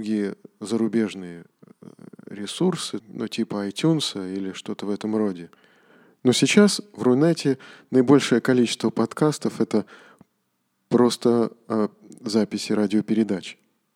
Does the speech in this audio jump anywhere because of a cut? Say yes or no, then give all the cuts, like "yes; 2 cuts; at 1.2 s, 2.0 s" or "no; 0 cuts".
yes; 1 cut; at 3.0 s